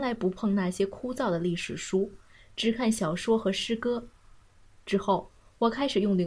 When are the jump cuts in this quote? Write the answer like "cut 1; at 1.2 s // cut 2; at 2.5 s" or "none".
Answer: none